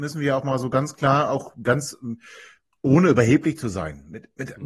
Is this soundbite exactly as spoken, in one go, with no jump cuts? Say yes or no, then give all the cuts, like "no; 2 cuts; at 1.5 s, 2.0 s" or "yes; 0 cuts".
no; 1 cut; at 2.7 s